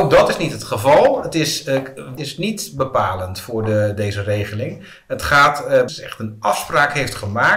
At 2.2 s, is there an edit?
yes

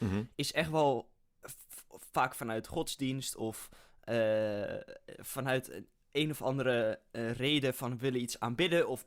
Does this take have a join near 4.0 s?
no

